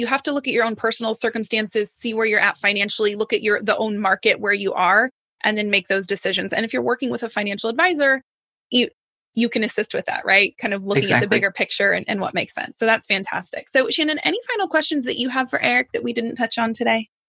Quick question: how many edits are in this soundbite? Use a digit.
0